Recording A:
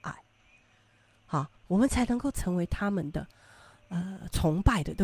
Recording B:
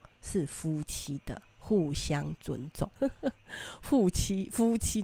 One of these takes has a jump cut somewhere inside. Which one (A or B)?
B